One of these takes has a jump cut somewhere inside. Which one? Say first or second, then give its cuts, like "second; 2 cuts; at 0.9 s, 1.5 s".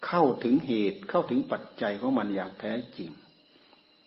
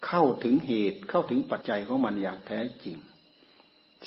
second; 1 cut; at 1.6 s